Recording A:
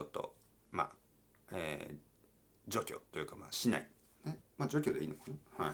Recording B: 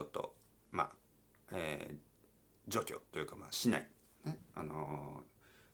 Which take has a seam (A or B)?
A